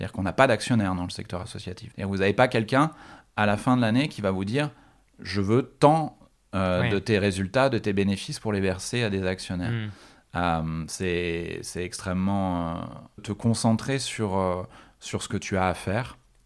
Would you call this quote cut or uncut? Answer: cut